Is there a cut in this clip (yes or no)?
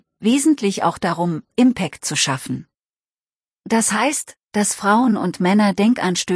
no